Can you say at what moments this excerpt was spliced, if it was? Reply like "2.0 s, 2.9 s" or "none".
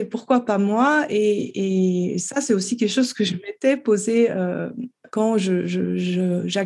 none

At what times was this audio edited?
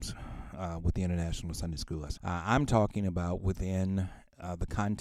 2.2 s

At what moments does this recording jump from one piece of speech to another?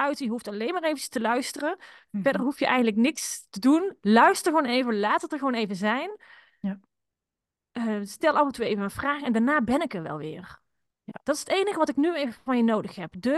none

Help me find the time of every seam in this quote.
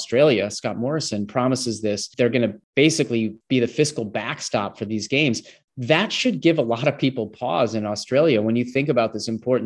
2.1 s

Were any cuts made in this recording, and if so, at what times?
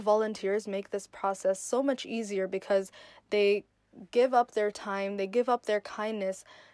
none

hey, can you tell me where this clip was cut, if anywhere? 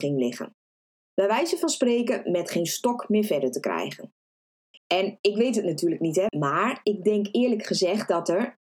4.8 s, 6.3 s

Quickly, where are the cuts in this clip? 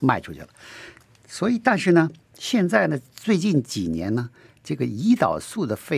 none

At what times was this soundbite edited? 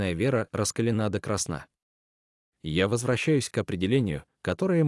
none

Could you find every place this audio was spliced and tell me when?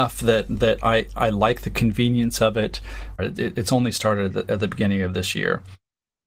3.2 s

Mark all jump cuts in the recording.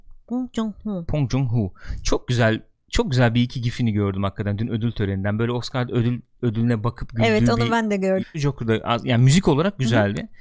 8.2 s

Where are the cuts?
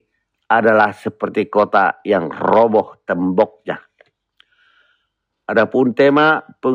none

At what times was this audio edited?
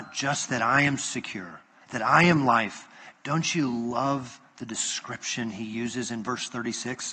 1.8 s

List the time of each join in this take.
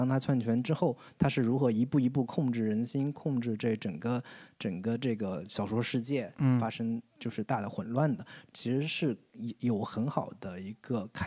8.5 s

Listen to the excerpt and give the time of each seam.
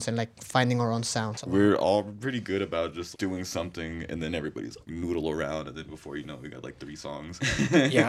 1.4 s, 3.1 s

